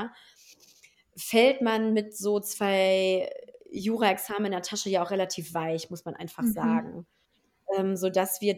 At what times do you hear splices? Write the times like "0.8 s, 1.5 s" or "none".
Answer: none